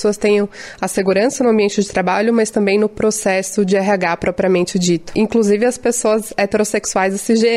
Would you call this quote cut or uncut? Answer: uncut